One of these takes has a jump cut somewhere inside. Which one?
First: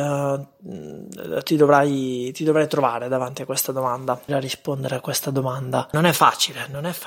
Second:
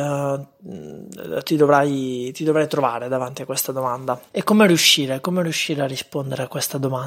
first; 1 cut; at 4.3 s

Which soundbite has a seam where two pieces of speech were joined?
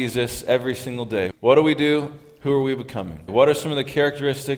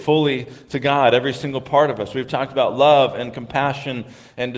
first; 2 cuts; at 1.3 s, 3.3 s

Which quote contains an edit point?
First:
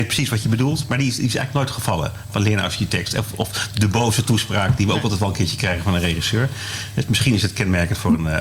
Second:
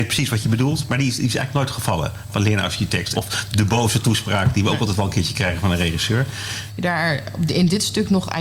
second; 2 cuts; at 3.1 s, 6.7 s

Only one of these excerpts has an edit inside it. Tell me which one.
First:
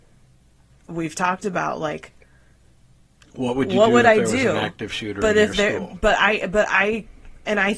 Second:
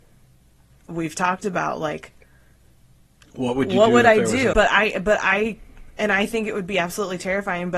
second; 1 cut; at 4.5 s

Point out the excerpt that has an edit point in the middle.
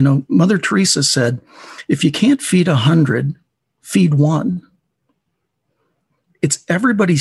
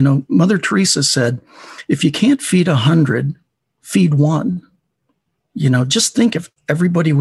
second; 1 cut; at 5.4 s

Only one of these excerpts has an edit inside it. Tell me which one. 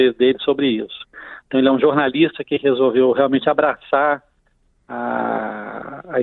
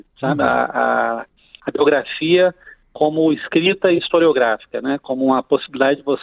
first; 1 cut; at 1.4 s

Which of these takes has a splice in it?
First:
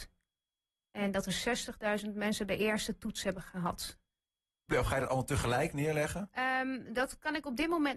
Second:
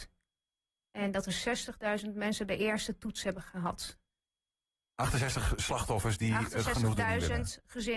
first; 1 cut; at 4.7 s

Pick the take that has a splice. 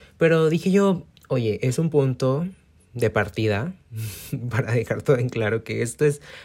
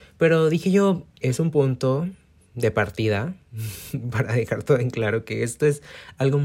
second; 1 cut; at 1.2 s

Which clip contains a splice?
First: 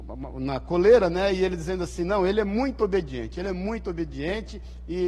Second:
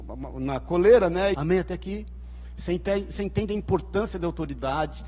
second; 1 cut; at 1.3 s

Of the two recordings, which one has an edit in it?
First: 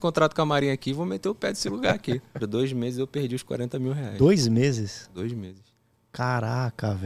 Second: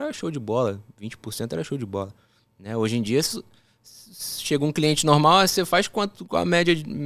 first; 1 cut; at 2.4 s

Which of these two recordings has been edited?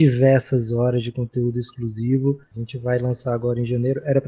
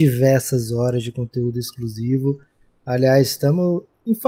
first; 1 cut; at 2.5 s

